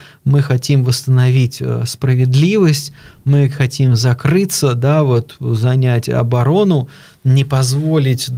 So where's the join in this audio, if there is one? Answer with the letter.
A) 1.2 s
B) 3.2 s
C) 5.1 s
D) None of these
D